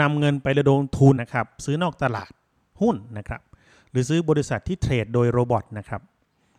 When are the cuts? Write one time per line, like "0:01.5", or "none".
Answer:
0:01.2